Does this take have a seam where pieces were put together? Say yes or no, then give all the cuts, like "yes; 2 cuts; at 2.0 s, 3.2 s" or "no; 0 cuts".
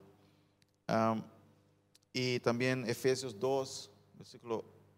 no; 0 cuts